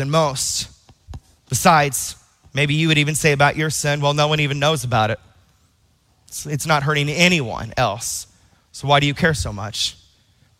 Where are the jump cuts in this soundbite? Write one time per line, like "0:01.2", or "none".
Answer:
none

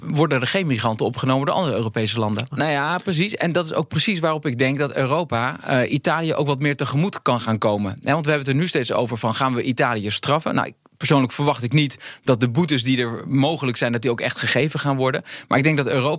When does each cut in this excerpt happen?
0:02.5

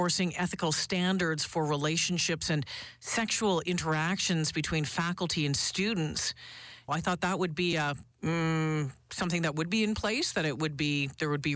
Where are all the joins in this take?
0:06.9
0:08.1

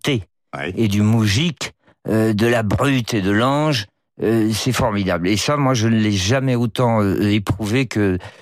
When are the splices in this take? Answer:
none

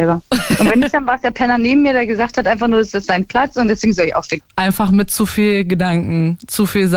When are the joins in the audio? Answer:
0:04.4

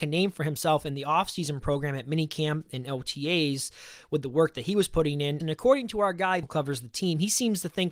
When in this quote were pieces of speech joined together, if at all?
0:05.4
0:06.4

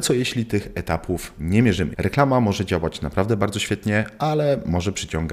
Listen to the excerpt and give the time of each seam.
0:01.9

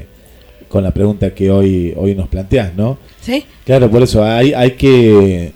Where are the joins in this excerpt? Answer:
0:03.1

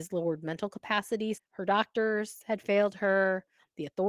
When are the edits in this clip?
0:01.3

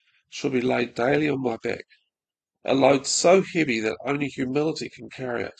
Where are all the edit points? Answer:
none

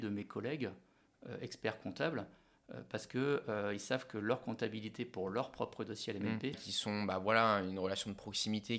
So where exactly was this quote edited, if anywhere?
0:06.5

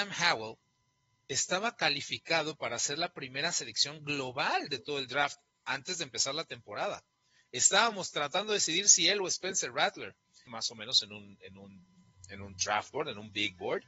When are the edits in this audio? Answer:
0:10.5

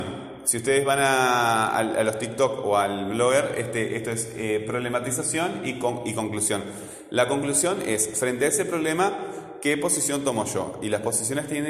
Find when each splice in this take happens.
none

